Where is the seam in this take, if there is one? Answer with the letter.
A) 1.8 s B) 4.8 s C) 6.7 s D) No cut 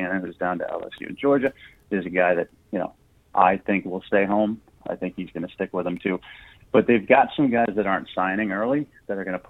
B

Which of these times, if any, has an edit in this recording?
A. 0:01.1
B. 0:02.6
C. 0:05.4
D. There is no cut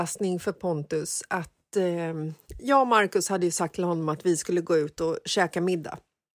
B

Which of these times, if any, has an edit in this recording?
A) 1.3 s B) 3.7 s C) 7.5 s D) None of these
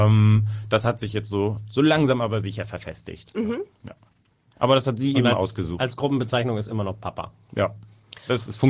D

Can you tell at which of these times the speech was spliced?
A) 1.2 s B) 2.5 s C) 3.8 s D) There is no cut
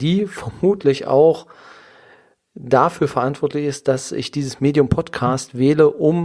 D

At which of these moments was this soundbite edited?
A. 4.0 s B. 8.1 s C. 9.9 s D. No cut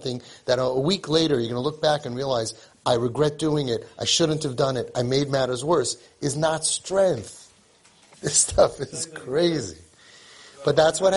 B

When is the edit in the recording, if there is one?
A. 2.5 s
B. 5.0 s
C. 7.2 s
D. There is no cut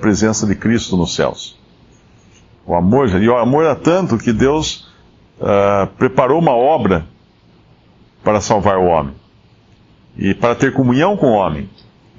A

